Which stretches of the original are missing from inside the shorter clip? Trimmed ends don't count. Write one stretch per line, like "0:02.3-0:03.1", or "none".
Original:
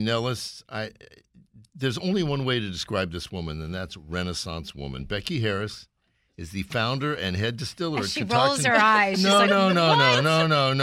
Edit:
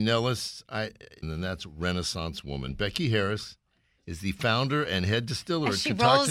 0:01.2-0:03.5